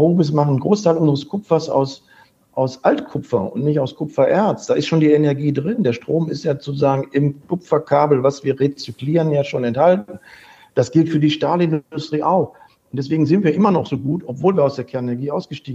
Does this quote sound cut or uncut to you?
uncut